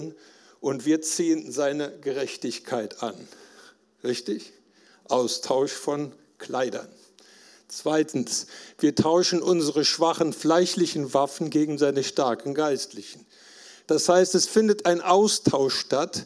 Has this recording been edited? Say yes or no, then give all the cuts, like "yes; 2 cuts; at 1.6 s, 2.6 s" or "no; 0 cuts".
yes; 1 cut; at 13.8 s